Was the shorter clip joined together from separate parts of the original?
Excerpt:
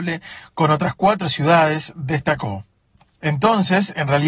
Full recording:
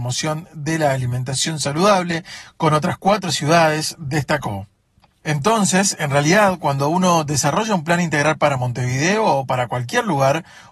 no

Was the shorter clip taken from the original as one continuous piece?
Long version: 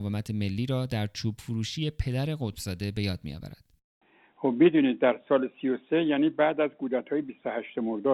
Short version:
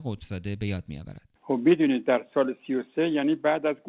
no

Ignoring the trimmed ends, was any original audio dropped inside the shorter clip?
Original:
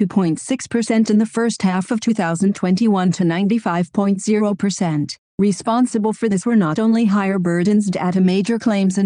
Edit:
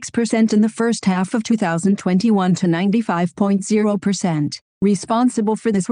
no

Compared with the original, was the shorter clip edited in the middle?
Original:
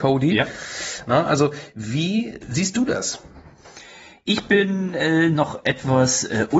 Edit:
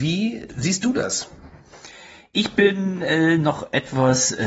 no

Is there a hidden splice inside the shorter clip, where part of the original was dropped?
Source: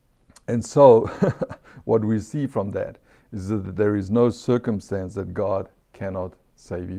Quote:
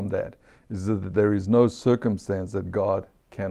no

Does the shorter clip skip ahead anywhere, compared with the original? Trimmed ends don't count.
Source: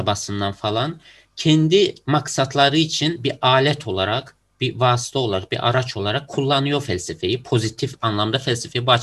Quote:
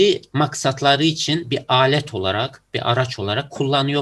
yes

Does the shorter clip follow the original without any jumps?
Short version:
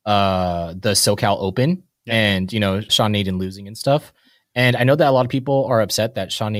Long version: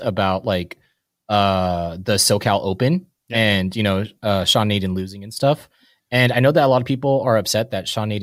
no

